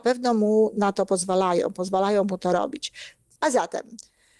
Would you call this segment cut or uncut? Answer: cut